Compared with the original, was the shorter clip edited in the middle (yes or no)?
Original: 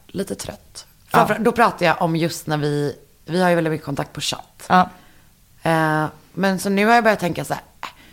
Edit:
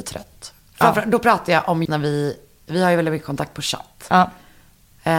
yes